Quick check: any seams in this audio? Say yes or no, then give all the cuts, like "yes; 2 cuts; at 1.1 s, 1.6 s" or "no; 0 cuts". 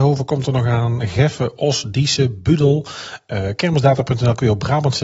no; 0 cuts